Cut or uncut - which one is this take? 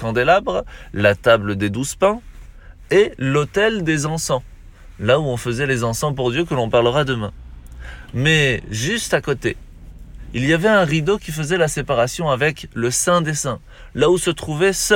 uncut